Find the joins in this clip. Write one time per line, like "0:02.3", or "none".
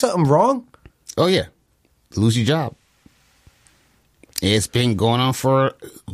none